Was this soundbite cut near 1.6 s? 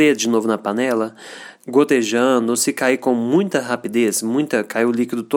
yes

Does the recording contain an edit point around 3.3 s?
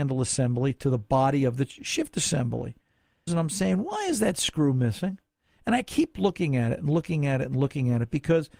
yes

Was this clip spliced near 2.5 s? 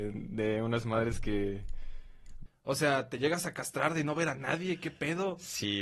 yes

